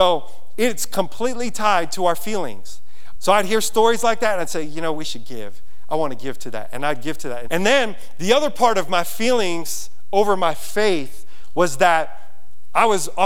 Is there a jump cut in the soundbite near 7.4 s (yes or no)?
yes